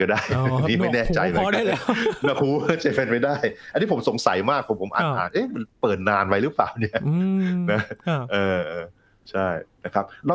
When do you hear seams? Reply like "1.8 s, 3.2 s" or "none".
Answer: none